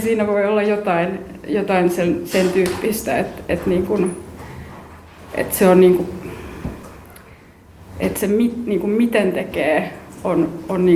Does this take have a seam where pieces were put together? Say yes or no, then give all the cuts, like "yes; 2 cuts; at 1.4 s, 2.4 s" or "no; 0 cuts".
no; 0 cuts